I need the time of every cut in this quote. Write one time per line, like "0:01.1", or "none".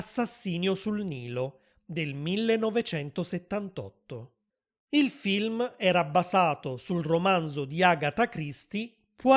none